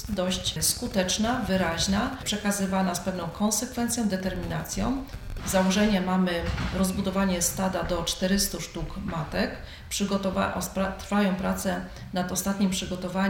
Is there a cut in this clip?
yes; 1 cut; at 5.4 s

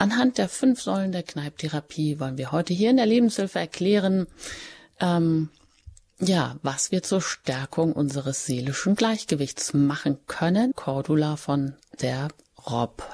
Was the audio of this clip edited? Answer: yes; 1 cut; at 10.7 s

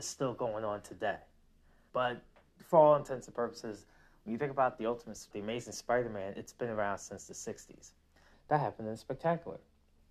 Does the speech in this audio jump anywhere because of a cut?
yes; 3 cuts; at 1.9 s, 5.3 s, 8.3 s

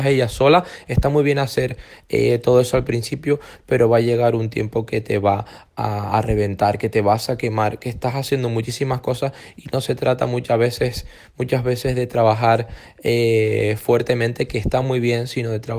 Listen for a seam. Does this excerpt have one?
no; 0 cuts

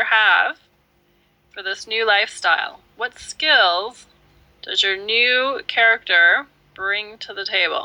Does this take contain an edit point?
no; 0 cuts

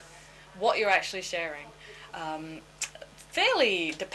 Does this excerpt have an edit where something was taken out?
yes; 1 cut; at 2.1 s

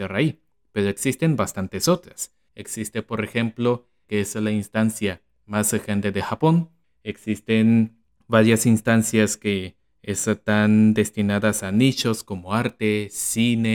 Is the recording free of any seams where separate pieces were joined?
no; 1 cut; at 4.0 s

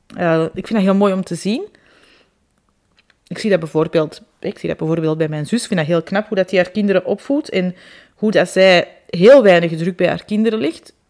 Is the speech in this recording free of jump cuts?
yes; 0 cuts

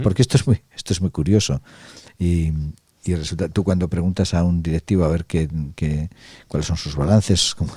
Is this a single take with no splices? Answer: yes; 0 cuts

